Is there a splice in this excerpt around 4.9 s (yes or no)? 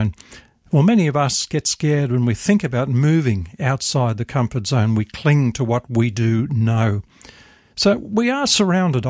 no